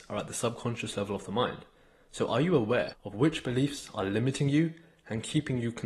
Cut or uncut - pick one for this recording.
uncut